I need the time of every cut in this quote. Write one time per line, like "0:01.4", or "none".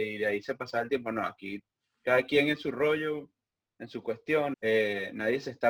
0:04.5